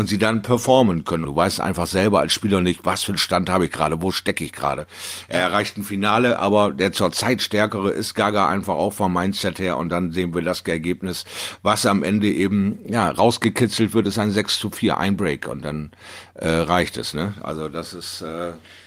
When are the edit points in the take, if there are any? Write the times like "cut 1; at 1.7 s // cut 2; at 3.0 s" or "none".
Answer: cut 1; at 1.2 s